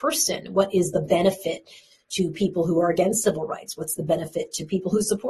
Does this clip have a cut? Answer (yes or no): no